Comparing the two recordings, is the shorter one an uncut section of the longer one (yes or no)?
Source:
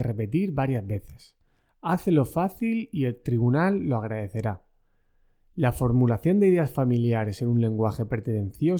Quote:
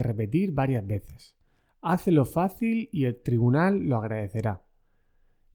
yes